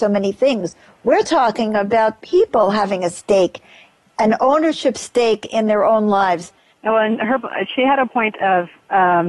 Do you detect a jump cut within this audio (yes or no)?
yes